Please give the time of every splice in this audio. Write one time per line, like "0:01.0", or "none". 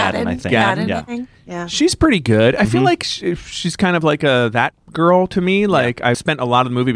none